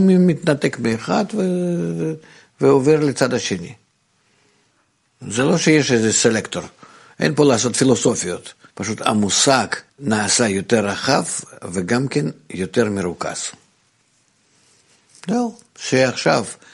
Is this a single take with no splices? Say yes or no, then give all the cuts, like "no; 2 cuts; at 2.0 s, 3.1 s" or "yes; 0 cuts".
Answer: no; 3 cuts; at 7.1 s, 8.7 s, 9.9 s